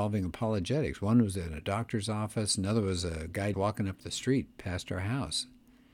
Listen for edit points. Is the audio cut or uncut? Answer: cut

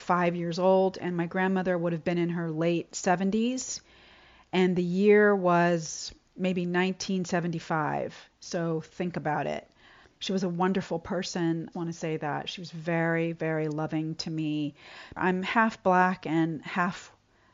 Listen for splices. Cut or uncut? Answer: cut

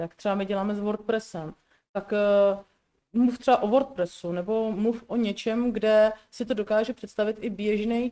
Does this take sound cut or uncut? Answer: uncut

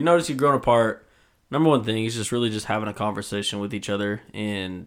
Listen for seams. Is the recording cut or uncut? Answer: uncut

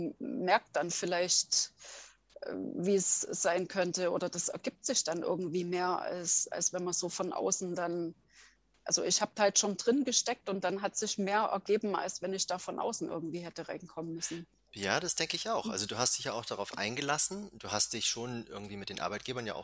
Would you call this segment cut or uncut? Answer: uncut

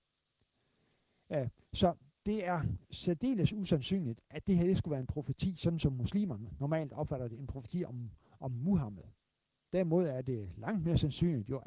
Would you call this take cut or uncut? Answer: uncut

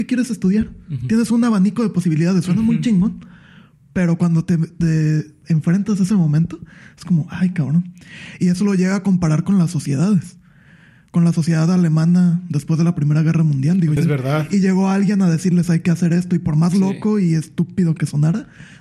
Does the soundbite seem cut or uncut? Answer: cut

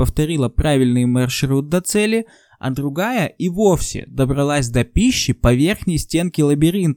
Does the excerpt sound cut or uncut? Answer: uncut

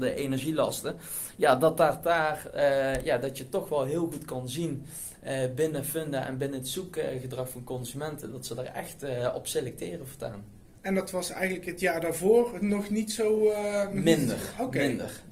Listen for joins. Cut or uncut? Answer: uncut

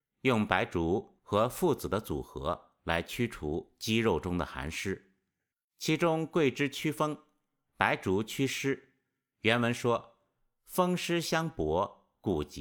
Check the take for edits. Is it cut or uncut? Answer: cut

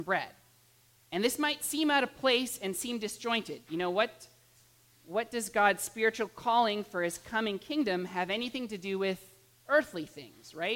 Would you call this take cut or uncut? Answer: uncut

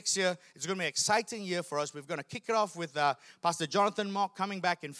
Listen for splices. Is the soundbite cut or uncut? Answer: uncut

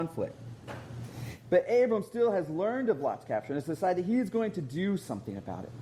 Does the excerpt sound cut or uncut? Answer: uncut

